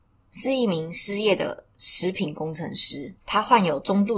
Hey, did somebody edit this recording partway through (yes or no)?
yes